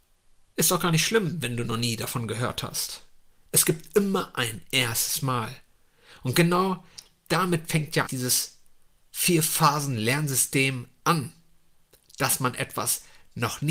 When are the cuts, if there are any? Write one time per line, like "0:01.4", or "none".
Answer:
0:08.1

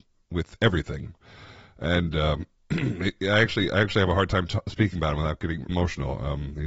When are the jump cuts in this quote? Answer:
0:05.7

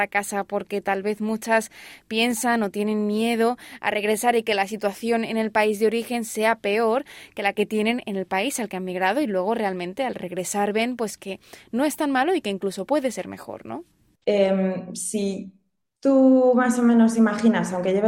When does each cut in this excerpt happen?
0:14.2

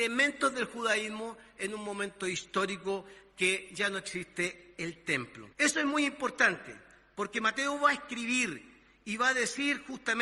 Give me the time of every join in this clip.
0:05.5

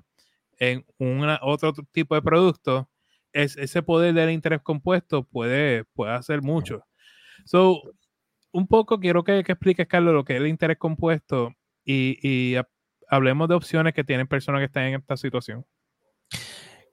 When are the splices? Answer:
0:03.3

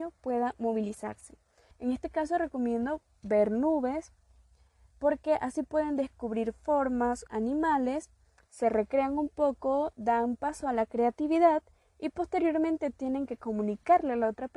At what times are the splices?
0:01.7
0:07.3

